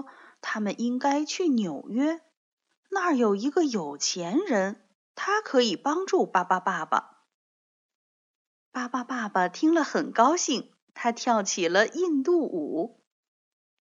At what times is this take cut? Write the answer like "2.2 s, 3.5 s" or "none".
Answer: none